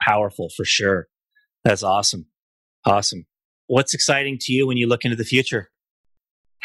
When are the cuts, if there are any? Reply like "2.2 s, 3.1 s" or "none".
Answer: none